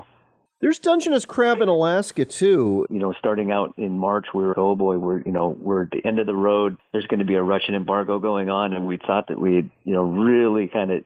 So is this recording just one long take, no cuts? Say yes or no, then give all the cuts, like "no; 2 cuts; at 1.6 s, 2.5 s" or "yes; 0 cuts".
no; 2 cuts; at 2.8 s, 4.5 s